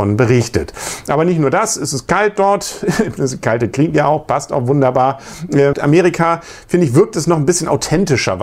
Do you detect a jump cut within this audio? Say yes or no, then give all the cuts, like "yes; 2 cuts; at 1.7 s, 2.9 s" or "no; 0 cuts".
yes; 1 cut; at 5.7 s